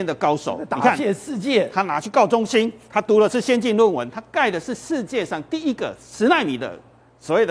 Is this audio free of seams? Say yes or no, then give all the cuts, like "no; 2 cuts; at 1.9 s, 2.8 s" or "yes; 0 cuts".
yes; 0 cuts